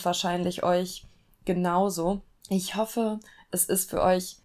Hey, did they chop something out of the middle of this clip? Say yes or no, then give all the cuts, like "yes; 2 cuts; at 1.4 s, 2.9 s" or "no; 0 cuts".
no; 0 cuts